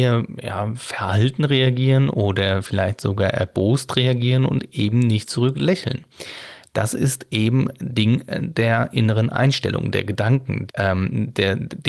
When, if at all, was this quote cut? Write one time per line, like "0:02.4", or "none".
0:10.7